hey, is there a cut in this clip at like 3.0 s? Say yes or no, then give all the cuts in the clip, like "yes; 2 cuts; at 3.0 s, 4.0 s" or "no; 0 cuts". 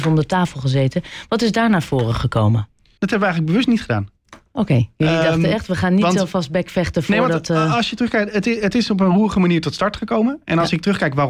yes; 1 cut; at 3.0 s